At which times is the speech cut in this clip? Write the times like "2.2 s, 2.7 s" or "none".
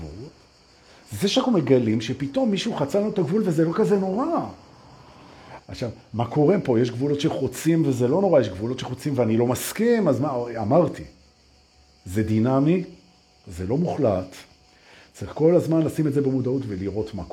5.6 s